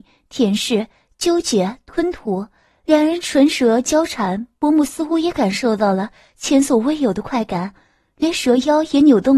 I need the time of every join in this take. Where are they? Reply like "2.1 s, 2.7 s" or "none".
none